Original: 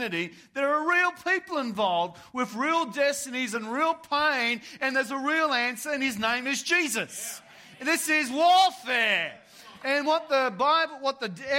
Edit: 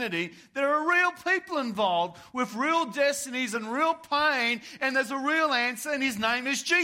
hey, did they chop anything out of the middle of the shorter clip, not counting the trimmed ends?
no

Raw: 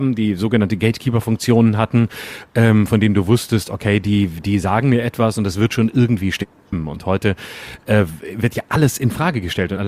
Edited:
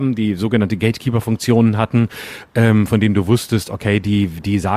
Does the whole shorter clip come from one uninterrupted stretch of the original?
yes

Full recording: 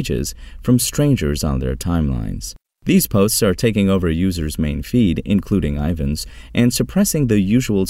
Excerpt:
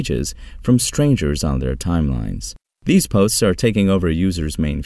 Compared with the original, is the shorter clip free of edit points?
yes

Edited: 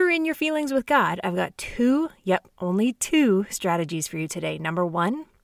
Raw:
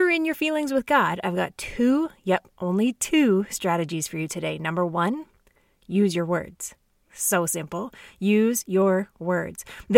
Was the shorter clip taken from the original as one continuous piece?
yes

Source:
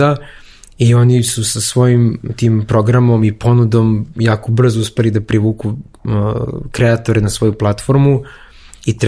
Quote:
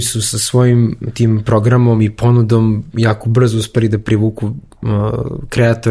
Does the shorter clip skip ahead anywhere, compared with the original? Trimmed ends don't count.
no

